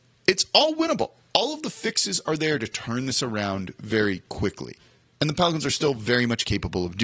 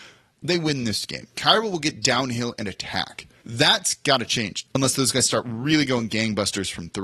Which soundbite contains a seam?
second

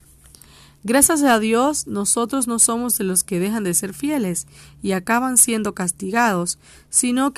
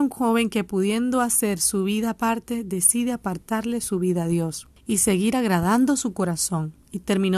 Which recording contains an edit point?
second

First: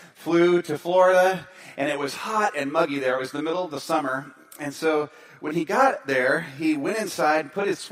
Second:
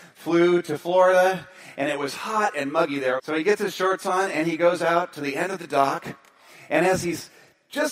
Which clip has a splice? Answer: second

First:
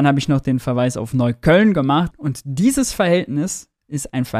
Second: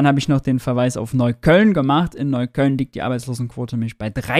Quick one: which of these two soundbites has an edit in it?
first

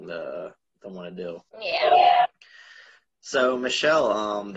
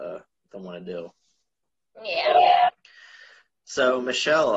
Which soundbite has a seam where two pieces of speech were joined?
first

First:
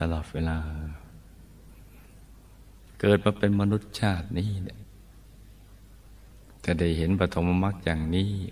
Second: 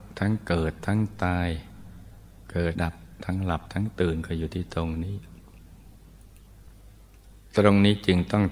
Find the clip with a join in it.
second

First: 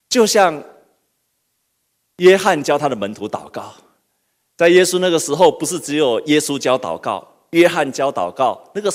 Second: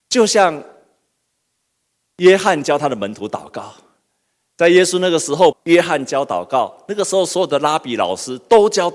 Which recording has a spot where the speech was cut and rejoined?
second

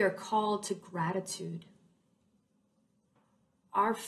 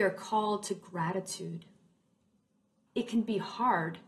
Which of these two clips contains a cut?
second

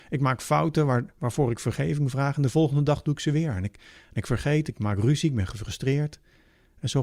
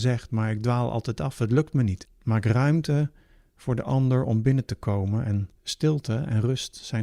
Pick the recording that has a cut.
second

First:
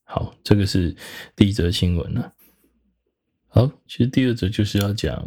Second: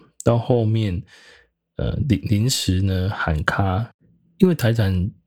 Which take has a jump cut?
first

